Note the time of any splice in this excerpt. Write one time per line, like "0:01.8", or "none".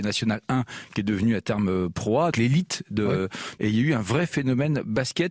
0:02.3
0:03.6